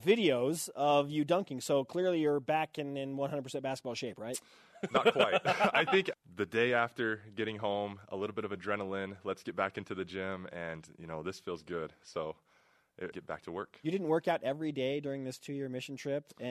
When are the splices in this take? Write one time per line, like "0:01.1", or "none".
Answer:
0:06.1
0:13.1